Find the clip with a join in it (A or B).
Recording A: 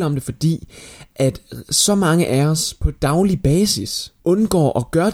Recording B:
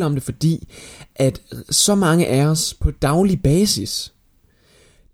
A